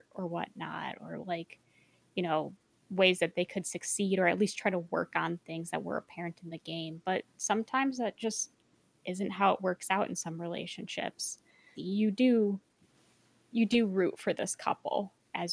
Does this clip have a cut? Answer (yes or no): yes